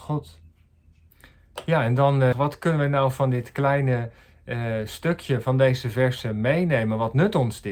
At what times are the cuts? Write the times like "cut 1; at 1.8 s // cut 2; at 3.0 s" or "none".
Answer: cut 1; at 2.3 s